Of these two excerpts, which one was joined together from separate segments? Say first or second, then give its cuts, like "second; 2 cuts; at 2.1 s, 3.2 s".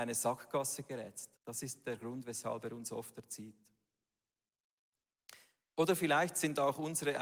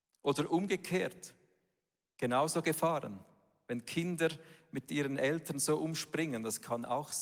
first; 1 cut; at 1.4 s